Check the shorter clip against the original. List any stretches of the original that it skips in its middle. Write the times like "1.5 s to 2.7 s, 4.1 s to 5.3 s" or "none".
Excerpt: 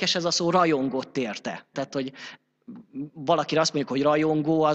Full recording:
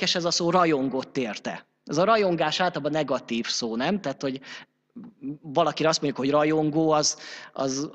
1.7 s to 4.0 s